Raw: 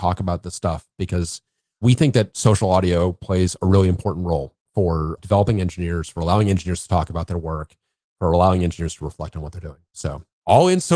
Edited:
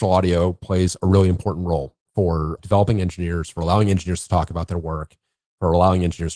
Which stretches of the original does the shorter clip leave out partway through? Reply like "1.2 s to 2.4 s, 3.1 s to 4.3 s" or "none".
none

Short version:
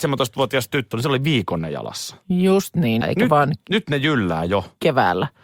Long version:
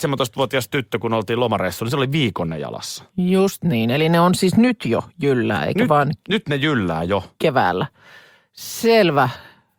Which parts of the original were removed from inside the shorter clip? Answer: 0.9 s to 1.8 s, 3.9 s to 5.6 s

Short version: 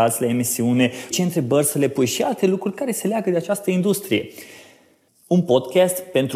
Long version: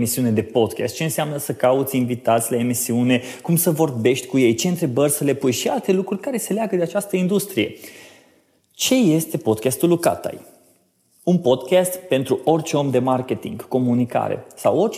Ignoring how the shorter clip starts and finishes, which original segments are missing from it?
3.4 s to 4.6 s, 8.5 s to 11.0 s

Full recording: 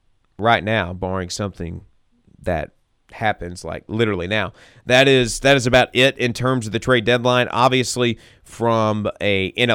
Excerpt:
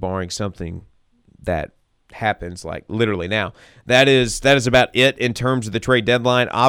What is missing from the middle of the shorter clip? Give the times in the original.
none

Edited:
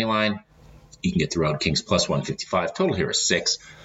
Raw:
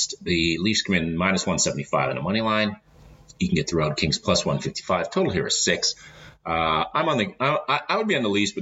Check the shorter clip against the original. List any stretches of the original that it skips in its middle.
none

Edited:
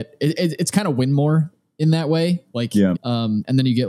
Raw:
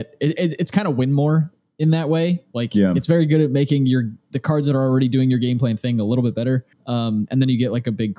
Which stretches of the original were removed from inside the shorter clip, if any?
2.9 s to 6.8 s

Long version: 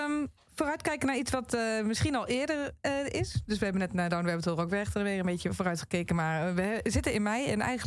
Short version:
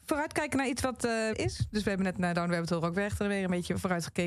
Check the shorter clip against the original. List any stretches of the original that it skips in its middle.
1.8 s to 3.1 s

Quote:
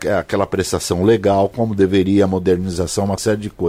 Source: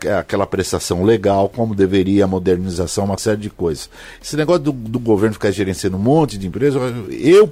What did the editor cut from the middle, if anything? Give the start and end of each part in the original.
none

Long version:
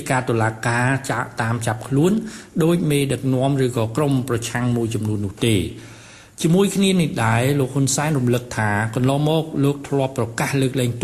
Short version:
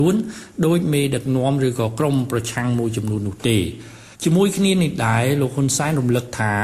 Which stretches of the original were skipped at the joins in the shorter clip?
6.1 s to 6.3 s

